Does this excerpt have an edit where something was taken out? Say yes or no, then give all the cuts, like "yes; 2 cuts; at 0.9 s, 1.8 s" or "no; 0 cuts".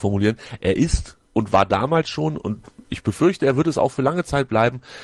yes; 1 cut; at 1.2 s